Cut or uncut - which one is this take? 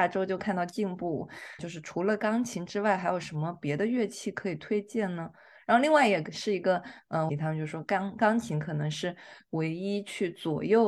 cut